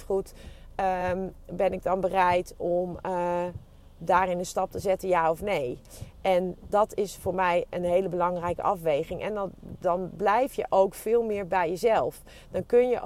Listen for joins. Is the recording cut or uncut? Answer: uncut